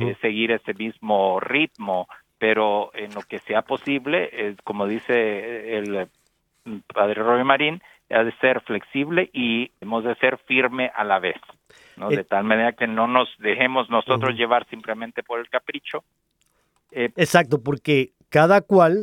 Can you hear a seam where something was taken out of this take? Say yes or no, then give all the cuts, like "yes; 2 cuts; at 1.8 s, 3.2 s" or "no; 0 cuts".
yes; 2 cuts; at 9.8 s, 17.1 s